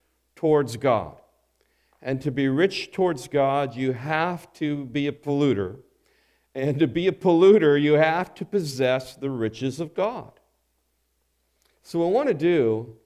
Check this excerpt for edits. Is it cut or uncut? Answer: uncut